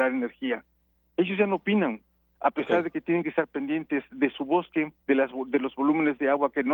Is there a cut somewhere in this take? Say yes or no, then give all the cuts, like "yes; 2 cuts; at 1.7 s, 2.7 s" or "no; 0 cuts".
yes; 1 cut; at 5.0 s